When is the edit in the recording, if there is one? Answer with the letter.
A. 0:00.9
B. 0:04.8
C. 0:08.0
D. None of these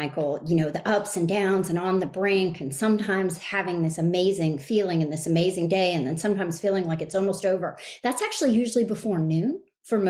D